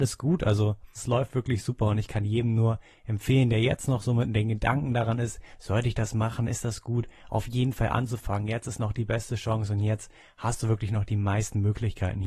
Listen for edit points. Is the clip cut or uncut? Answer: cut